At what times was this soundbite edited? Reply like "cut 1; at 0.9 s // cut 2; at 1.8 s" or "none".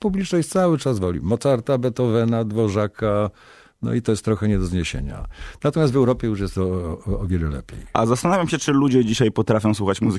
none